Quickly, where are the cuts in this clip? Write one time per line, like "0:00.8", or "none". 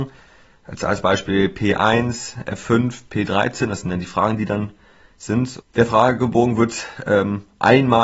0:03.1
0:05.6